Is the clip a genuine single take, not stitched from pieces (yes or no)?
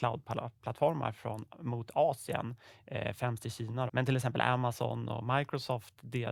no